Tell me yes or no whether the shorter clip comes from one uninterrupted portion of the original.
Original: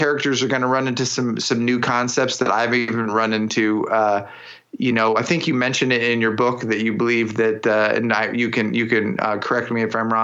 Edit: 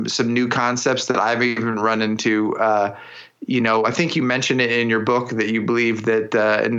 yes